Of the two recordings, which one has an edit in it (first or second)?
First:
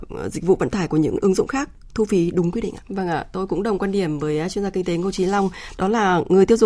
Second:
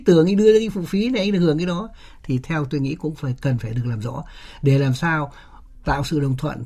first